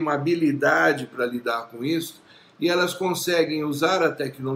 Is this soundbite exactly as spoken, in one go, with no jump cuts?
yes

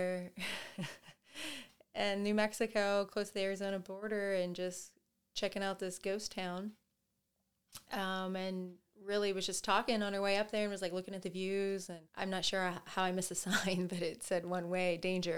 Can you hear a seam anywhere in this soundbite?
yes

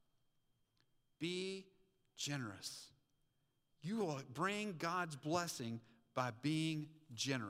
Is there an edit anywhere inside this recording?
no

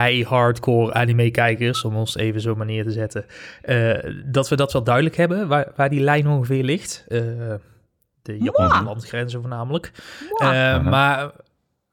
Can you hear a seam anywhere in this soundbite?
no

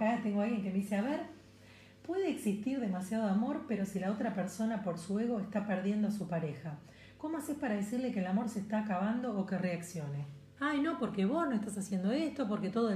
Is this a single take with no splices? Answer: no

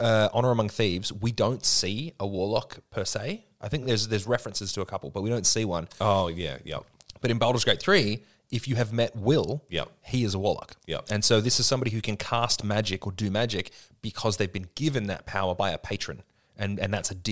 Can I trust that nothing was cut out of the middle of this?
yes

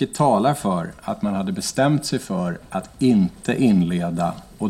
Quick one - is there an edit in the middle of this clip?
no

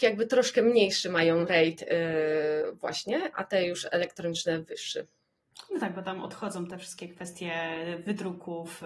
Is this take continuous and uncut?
no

